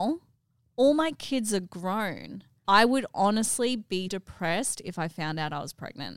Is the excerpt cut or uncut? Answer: cut